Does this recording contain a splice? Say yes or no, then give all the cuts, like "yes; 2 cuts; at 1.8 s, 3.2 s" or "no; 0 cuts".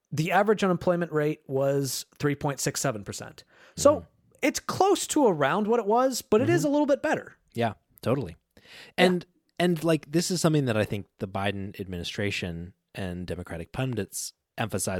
no; 0 cuts